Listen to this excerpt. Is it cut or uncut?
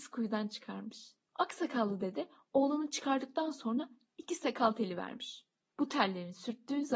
uncut